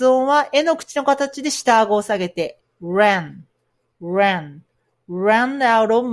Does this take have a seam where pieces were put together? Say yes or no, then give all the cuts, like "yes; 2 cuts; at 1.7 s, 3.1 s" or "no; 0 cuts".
yes; 1 cut; at 2.6 s